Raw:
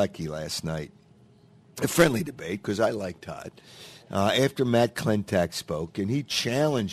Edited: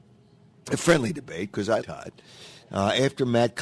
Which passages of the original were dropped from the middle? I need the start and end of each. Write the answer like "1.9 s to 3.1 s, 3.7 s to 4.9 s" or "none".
2.9 s to 3.2 s